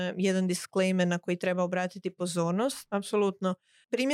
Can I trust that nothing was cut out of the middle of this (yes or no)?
no